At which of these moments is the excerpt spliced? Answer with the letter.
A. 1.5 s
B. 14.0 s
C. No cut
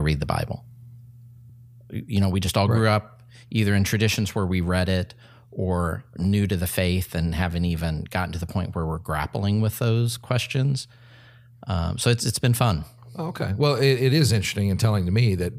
C